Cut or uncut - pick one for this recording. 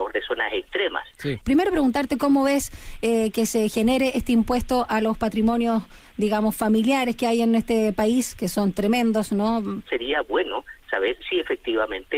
cut